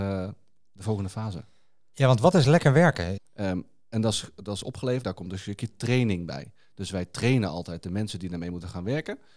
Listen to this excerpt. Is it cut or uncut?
cut